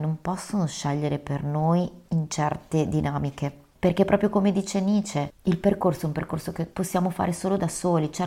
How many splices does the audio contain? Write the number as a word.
one